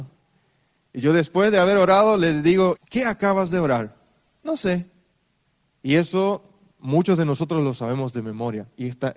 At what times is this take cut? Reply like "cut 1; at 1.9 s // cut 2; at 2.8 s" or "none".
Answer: cut 1; at 2.8 s // cut 2; at 5.7 s